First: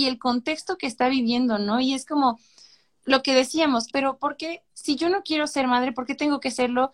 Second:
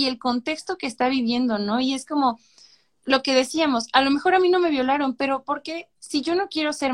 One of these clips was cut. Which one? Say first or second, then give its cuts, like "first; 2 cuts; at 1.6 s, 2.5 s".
first; 1 cut; at 3.9 s